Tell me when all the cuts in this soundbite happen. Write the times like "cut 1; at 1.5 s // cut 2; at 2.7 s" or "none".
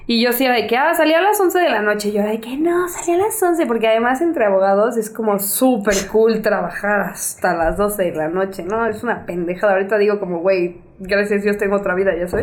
none